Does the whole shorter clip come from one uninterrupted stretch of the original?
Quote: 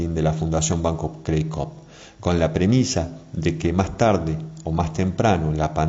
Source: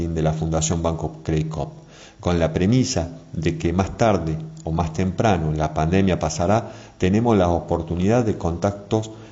yes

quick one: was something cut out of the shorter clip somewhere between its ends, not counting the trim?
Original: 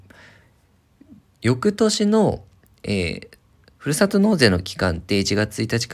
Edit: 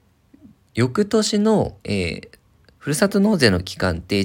yes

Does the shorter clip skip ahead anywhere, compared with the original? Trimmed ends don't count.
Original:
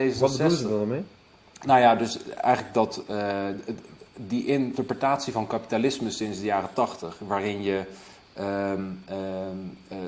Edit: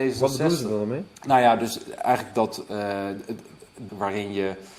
yes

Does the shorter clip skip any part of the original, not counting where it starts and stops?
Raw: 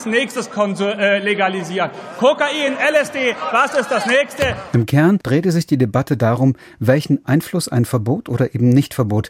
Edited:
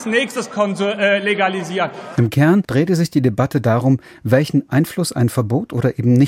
yes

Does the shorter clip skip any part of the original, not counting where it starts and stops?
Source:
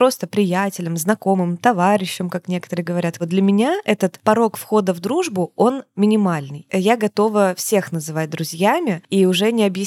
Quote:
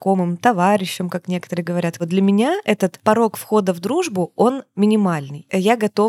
no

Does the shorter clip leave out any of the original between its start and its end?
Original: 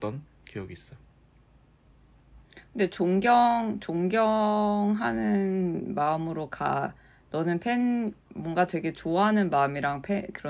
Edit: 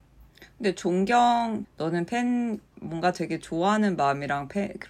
yes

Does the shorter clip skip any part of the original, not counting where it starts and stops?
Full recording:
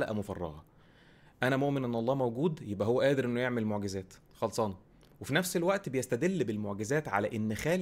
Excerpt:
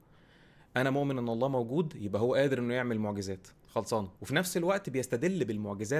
yes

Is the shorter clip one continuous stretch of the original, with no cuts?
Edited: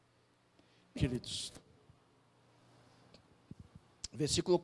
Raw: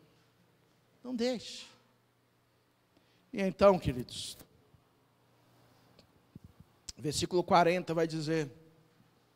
no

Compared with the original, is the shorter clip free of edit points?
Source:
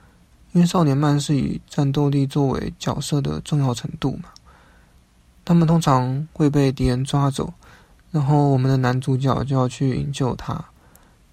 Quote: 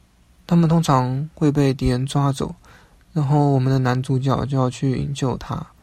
yes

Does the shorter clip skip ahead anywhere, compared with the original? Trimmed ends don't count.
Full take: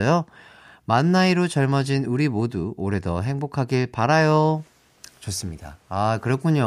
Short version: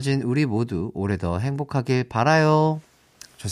no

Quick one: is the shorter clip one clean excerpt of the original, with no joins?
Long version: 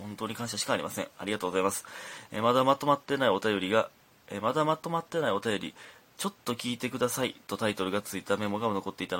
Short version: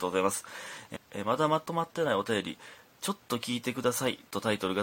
no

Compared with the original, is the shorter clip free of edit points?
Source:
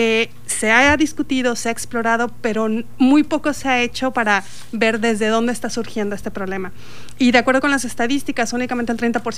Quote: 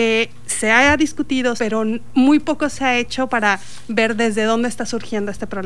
no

